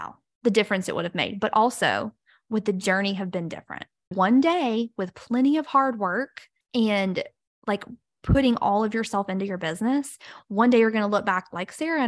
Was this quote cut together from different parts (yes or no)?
yes